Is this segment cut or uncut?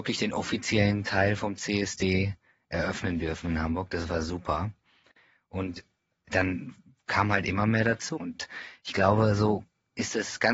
cut